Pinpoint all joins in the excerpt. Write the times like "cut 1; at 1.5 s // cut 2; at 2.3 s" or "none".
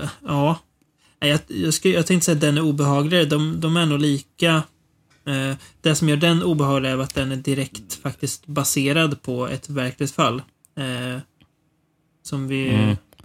none